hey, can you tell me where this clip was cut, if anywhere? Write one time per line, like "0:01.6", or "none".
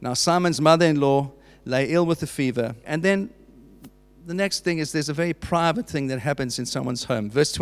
0:02.8